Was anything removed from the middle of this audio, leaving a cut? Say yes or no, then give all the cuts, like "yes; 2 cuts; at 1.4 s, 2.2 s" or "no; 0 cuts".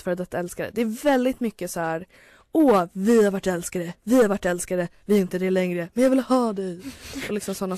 no; 0 cuts